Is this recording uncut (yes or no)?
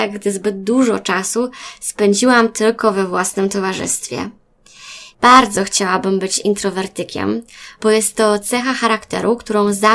no